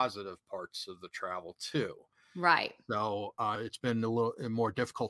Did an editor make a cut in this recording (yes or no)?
yes